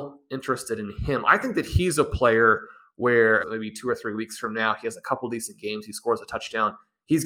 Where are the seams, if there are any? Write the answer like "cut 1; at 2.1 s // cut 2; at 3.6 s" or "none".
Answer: cut 1; at 3.4 s